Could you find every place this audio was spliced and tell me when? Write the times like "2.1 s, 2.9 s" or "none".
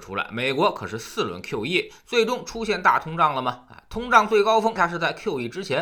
4.8 s